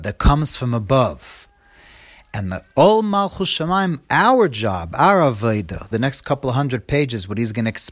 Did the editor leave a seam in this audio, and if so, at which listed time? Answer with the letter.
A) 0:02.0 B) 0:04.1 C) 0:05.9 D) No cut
C